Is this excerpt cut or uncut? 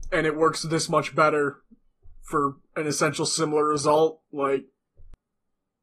uncut